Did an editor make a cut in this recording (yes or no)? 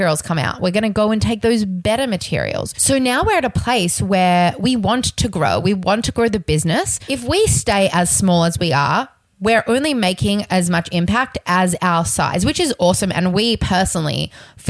no